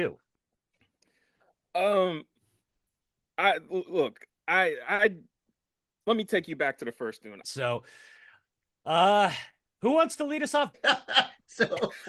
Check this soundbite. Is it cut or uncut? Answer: cut